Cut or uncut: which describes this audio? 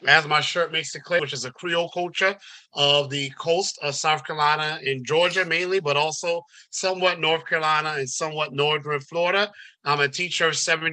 cut